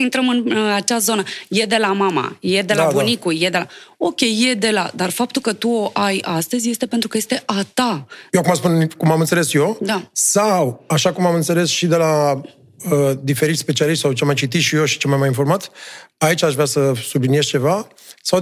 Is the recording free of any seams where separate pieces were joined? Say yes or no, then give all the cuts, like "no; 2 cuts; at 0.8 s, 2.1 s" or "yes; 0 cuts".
no; 1 cut; at 8.3 s